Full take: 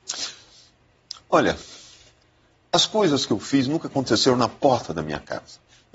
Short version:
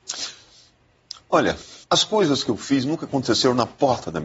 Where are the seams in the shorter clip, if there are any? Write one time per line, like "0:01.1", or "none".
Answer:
0:01.8